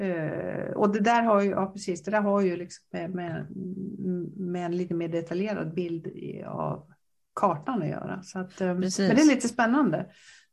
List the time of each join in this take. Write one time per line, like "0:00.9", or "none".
none

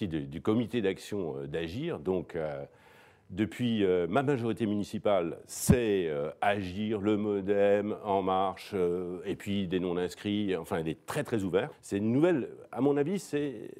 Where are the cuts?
0:11.7

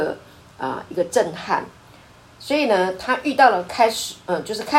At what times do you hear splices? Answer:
none

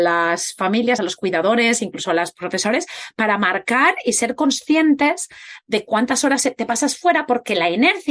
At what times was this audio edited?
none

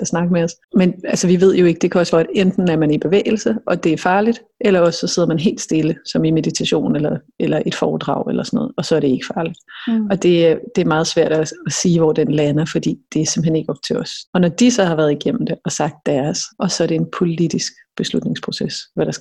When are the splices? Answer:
0:02.1
0:14.3
0:16.5

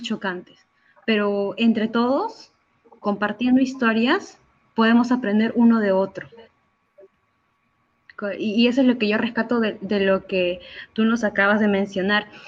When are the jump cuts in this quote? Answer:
none

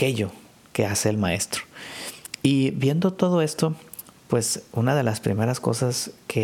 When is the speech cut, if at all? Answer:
none

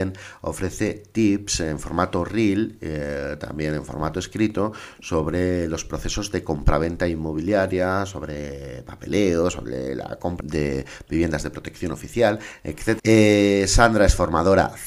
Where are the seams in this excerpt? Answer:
0:10.4
0:13.0

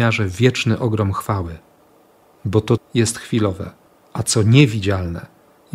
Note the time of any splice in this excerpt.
0:02.8

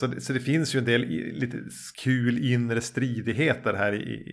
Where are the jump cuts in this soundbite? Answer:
0:01.9

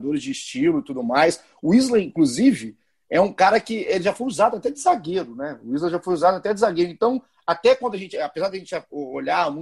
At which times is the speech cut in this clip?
none

